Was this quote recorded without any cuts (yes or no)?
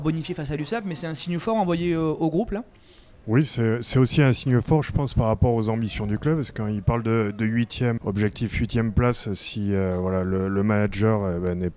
no